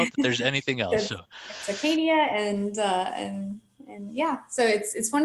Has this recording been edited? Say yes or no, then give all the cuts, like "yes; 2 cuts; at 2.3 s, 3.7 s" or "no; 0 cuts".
no; 0 cuts